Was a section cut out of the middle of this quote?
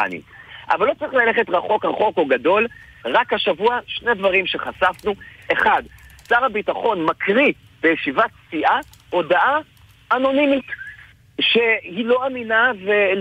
no; 0 cuts

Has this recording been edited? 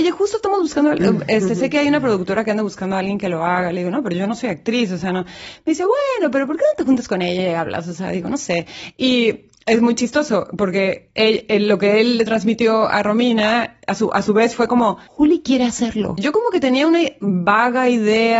yes; 2 cuts; at 15.1 s, 16.2 s

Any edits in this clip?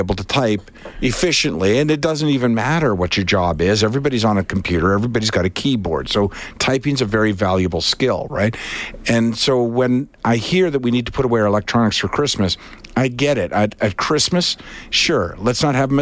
no; 0 cuts

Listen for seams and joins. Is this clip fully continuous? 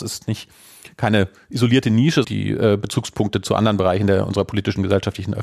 no; 1 cut; at 2.2 s

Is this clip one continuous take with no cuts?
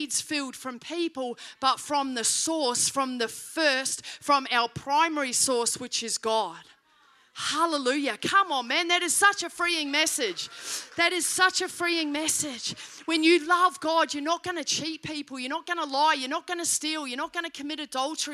yes; 0 cuts

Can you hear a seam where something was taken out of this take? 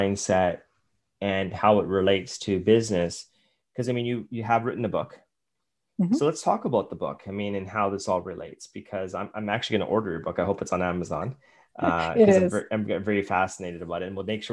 no; 0 cuts

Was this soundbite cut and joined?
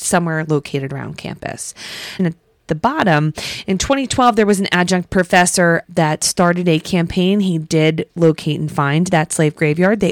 yes; 2 cuts; at 2.2 s, 5.8 s

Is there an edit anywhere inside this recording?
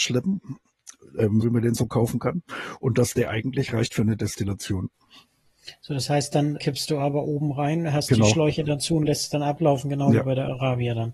yes; 2 cuts; at 1.4 s, 6.6 s

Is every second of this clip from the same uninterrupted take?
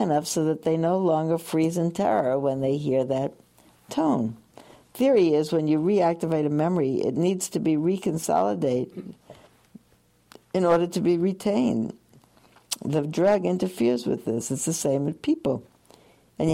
yes; 0 cuts

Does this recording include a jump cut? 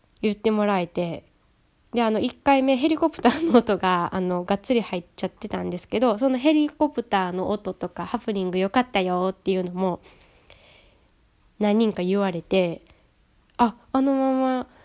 no; 0 cuts

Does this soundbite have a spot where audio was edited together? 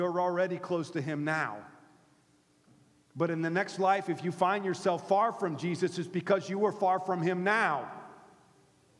no; 0 cuts

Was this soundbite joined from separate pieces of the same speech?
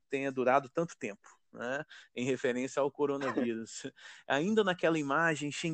no; 0 cuts

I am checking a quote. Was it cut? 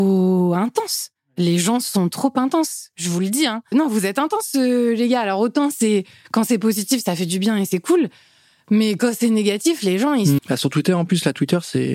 yes; 2 cuts; at 3.7 s, 10.4 s

